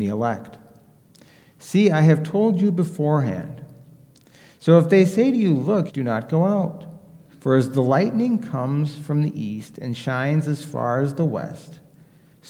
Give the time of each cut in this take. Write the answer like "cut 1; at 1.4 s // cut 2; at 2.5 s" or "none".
cut 1; at 5.9 s // cut 2; at 7.3 s